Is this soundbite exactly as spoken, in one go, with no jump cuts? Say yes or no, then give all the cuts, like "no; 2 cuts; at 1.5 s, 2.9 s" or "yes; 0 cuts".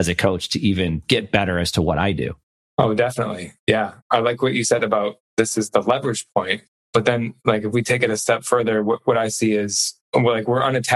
yes; 0 cuts